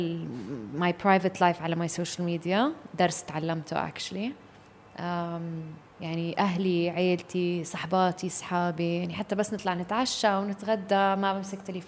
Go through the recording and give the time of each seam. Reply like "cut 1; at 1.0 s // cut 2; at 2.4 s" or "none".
cut 1; at 5.9 s